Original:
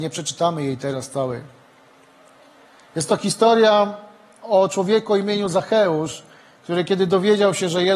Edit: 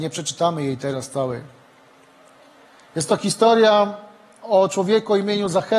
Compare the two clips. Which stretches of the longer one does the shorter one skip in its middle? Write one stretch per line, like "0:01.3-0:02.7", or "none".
none

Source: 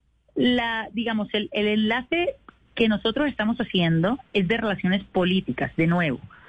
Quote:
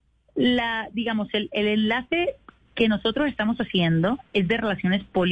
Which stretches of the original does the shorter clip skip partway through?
none

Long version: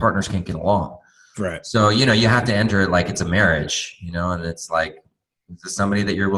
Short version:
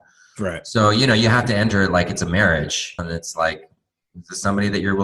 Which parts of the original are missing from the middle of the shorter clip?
0:04.0-0:04.3

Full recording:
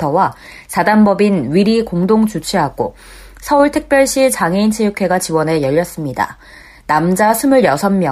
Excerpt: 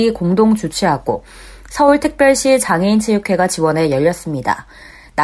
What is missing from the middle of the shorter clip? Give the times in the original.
none

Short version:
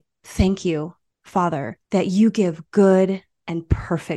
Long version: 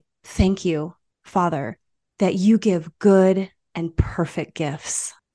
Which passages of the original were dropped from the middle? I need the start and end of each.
0:01.8-0:02.1

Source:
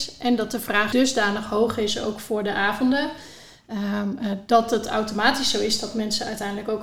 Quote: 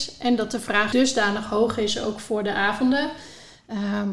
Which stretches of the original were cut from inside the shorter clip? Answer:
none

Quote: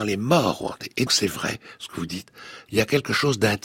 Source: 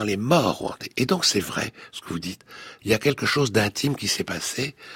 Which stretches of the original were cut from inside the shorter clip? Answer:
0:01.1-0:01.2

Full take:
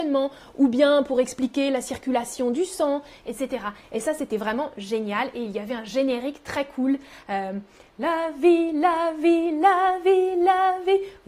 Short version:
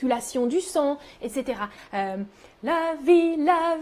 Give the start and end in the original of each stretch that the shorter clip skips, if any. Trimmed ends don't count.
0:03.8-0:07.1

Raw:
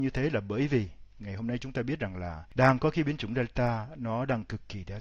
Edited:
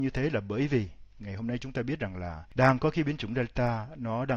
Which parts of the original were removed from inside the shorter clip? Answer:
none

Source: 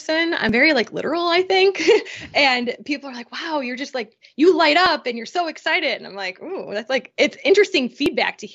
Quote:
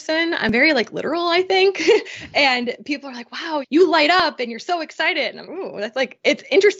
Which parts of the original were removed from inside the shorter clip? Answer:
0:03.6-0:04.3
0:06.1-0:06.4

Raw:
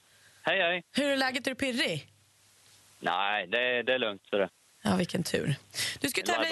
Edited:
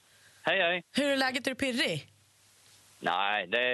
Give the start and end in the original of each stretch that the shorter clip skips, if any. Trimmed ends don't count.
none

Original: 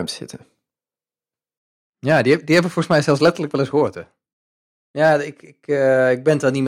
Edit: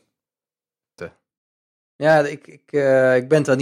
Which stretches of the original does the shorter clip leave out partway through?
0:01.5-0:03.9

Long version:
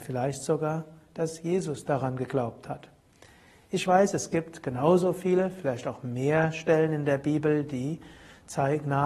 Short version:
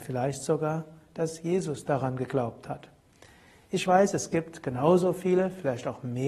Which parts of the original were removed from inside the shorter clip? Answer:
none

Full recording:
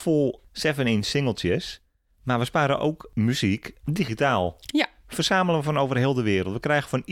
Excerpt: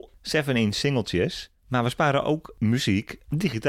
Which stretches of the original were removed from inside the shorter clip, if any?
0:01.9-0:02.1

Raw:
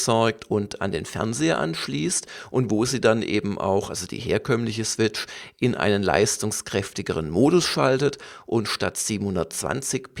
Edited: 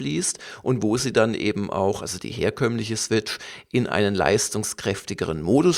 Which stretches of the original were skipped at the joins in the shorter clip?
none

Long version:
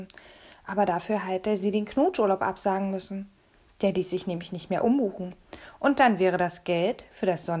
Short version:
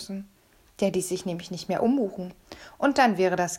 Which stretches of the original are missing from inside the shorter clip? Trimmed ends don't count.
none

